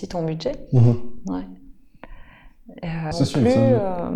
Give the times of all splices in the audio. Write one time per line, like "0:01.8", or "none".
0:03.1